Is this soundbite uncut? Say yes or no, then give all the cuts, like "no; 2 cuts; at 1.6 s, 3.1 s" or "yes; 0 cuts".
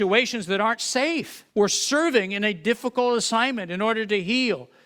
no; 1 cut; at 1.5 s